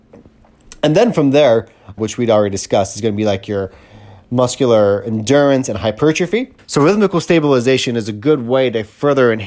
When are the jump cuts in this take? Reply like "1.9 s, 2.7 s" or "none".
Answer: 2.0 s, 6.6 s